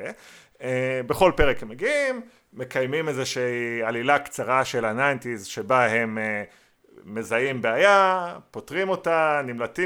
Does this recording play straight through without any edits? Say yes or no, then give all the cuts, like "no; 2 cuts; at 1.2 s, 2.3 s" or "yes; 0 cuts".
yes; 0 cuts